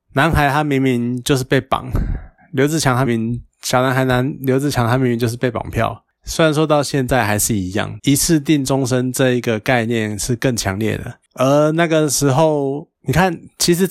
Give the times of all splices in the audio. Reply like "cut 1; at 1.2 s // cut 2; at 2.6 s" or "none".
cut 1; at 3.1 s // cut 2; at 6.2 s // cut 3; at 8.0 s